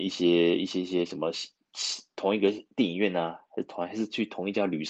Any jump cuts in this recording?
no; 0 cuts

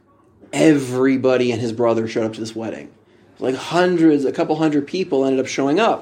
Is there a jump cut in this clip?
no; 0 cuts

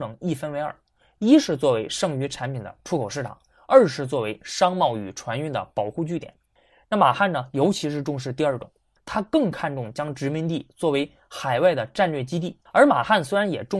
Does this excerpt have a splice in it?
yes; 1 cut; at 12.7 s

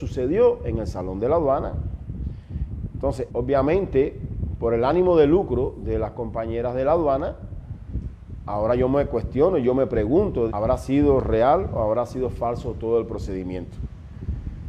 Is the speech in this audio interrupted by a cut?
yes; 2 cuts; at 3.3 s, 10.5 s

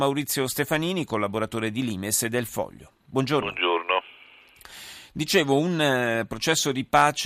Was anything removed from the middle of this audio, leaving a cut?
no; 0 cuts

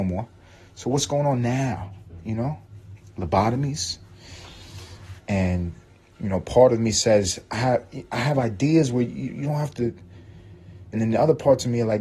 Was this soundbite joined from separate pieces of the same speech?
yes; 2 cuts; at 5.2 s, 10.9 s

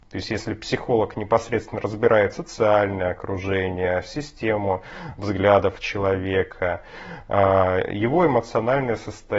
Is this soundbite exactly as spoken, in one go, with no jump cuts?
yes; 0 cuts

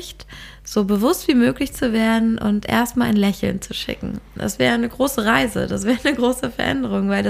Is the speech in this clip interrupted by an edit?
no; 0 cuts

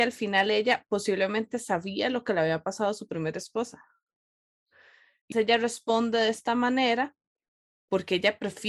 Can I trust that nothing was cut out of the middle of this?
no; 1 cut; at 5.3 s

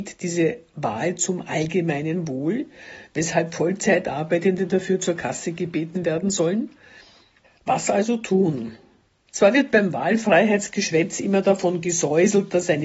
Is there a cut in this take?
yes; 2 cuts; at 7.4 s, 9.3 s

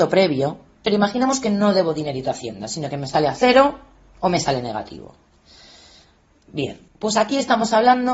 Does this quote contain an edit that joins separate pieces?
yes; 1 cut; at 6.9 s

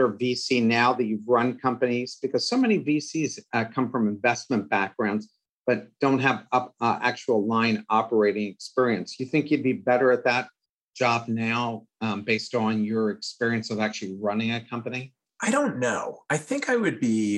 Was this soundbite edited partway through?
no; 0 cuts

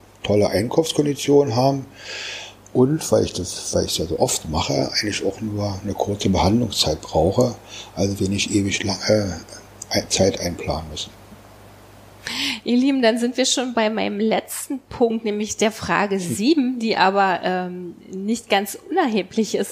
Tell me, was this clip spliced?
no; 0 cuts

